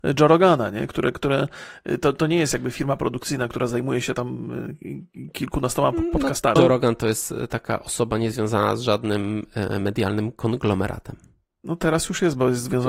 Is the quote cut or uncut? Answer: cut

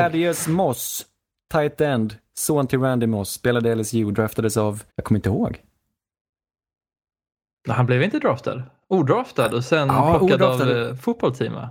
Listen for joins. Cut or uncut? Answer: cut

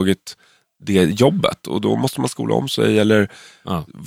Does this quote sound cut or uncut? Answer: uncut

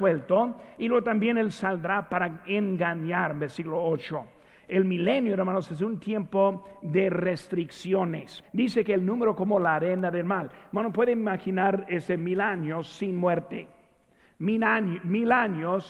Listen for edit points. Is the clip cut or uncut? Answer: cut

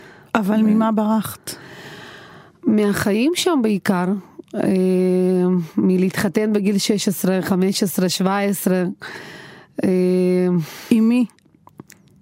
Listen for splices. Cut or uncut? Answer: uncut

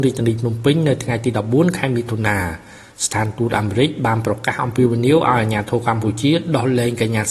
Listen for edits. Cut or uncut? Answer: uncut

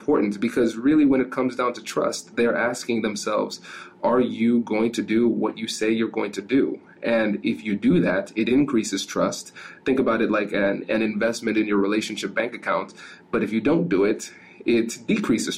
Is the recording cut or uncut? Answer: uncut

